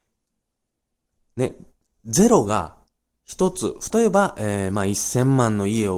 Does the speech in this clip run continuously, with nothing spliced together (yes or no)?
no